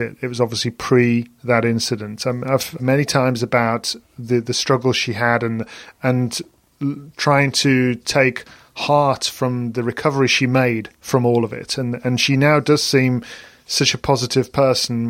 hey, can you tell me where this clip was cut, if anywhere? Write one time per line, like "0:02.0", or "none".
0:02.8